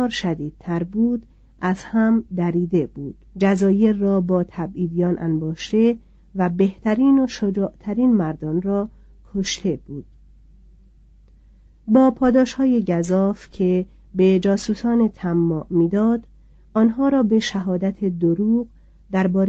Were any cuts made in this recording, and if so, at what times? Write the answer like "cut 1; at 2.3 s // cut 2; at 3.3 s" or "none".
cut 1; at 3.3 s